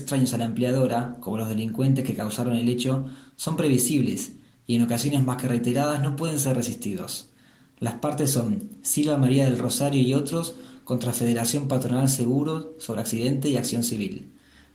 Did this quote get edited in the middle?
no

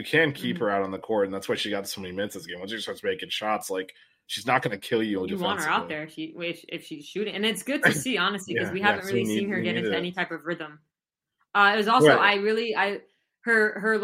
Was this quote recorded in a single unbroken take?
yes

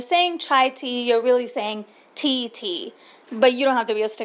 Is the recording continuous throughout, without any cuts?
no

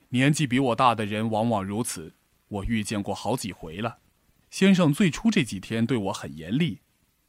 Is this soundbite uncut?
no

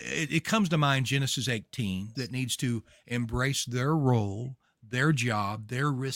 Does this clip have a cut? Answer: yes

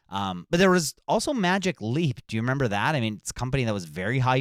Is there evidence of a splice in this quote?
no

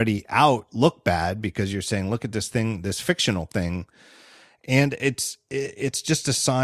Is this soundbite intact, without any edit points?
yes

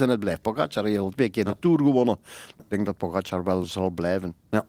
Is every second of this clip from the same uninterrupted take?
no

